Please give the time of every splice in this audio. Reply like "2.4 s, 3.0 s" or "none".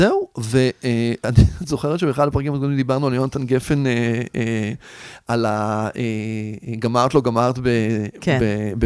none